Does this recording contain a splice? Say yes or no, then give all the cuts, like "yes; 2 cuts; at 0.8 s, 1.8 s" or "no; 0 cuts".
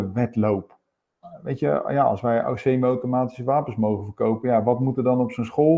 yes; 1 cut; at 1.2 s